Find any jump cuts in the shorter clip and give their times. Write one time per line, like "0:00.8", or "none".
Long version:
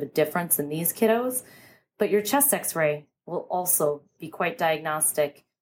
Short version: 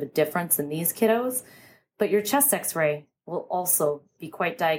none